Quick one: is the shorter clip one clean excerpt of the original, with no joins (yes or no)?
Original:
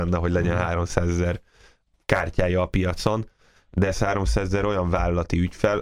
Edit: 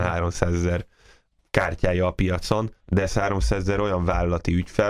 no